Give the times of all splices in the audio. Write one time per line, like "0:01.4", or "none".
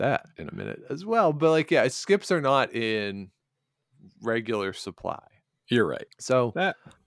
0:01.9
0:06.1